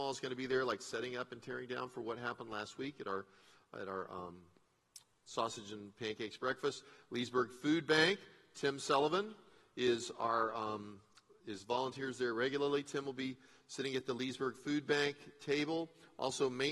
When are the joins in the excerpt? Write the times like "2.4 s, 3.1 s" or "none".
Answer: none